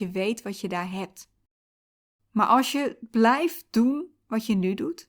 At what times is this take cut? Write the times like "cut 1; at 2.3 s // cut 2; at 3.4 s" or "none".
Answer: cut 1; at 2.2 s